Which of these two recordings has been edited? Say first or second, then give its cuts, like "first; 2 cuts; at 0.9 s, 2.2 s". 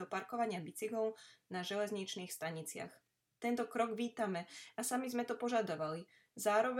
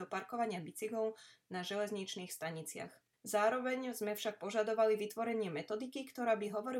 second; 1 cut; at 3.1 s